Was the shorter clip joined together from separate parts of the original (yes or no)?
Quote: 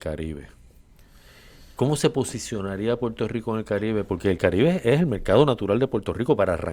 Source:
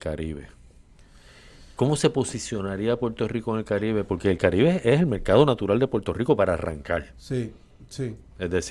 no